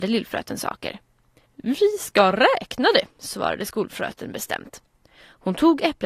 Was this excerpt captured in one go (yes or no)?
no